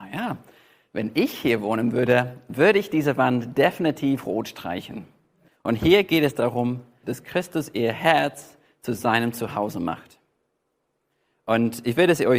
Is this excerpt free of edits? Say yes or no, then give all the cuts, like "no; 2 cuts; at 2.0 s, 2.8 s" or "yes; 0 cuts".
no; 2 cuts; at 5.5 s, 7.0 s